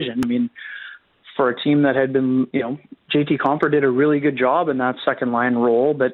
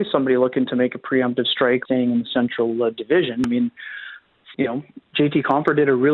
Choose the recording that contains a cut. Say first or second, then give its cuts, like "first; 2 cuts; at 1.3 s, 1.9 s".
second; 2 cuts; at 1.8 s, 4.5 s